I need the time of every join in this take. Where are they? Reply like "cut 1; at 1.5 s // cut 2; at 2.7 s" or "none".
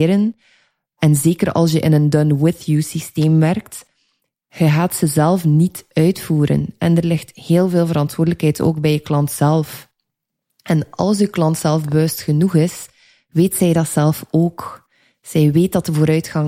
none

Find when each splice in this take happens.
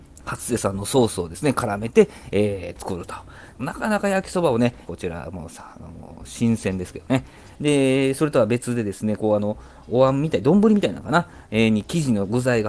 cut 1; at 3.5 s // cut 2; at 4.8 s // cut 3; at 7.5 s

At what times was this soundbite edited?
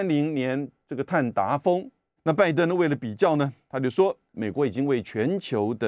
cut 1; at 2.2 s // cut 2; at 4.3 s

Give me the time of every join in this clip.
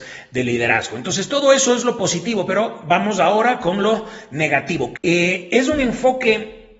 cut 1; at 4.9 s

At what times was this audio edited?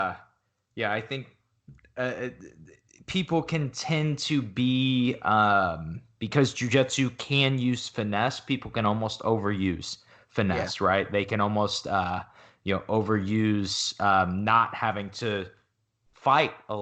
none

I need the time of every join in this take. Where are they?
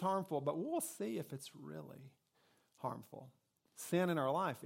cut 1; at 3.7 s

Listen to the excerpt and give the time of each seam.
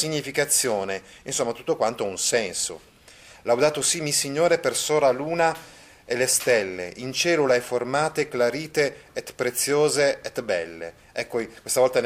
none

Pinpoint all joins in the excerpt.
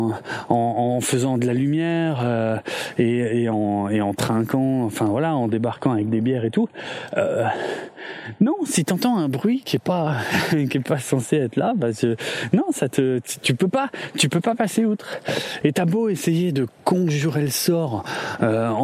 cut 1; at 15.6 s

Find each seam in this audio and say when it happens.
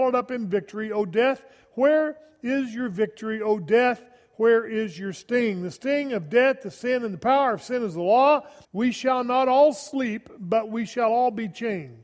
cut 1; at 8.6 s

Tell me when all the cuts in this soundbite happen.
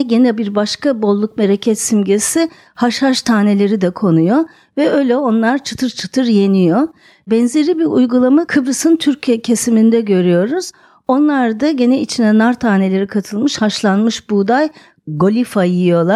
none

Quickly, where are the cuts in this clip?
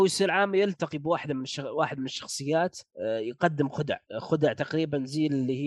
cut 1; at 2.9 s // cut 2; at 4.1 s

